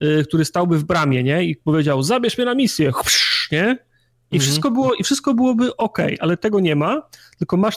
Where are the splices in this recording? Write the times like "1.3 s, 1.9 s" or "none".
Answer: none